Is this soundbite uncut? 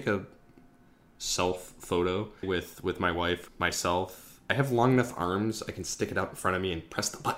no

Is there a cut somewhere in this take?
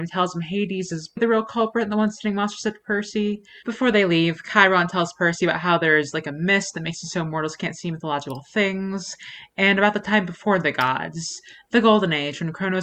yes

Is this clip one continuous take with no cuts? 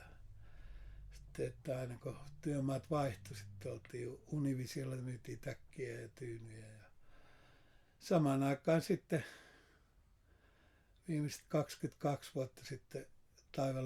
yes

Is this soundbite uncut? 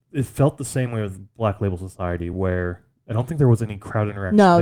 yes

